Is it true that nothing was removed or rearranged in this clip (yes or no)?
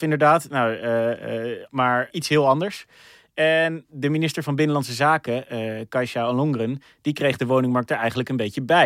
no